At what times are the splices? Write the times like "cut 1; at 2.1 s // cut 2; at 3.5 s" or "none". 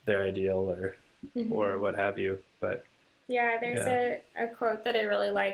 none